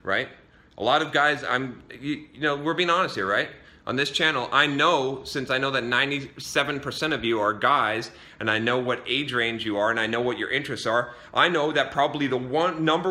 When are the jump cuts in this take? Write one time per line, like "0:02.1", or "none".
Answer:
none